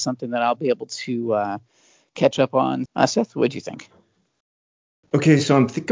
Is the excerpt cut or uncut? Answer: cut